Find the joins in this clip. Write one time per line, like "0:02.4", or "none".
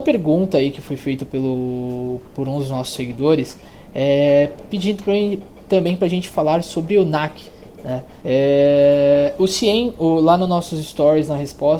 0:08.2